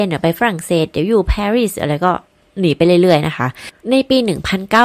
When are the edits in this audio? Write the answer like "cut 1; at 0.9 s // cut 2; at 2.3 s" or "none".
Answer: cut 1; at 3.8 s